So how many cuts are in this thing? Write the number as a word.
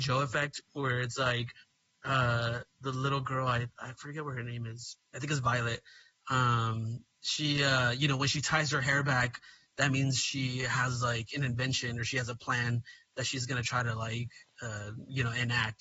one